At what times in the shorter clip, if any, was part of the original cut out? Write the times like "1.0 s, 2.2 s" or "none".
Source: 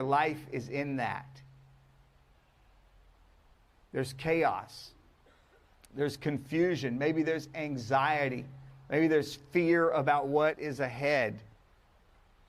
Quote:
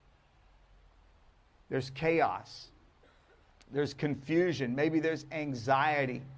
none